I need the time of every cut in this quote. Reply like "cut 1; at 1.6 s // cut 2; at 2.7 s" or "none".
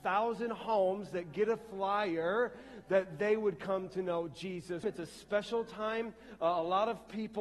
cut 1; at 4.8 s